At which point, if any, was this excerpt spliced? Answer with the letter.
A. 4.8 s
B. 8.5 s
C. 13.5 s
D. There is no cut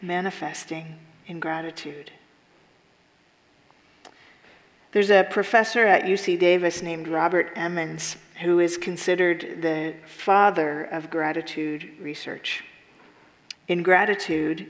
C